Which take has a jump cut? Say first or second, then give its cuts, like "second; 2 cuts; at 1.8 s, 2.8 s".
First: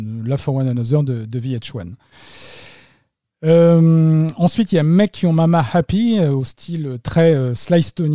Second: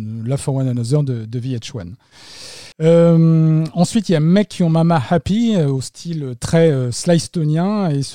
second; 1 cut; at 2.7 s